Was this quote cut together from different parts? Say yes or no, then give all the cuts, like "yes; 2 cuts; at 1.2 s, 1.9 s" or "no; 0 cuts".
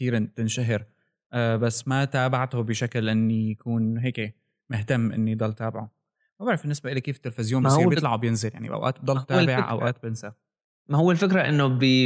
no; 0 cuts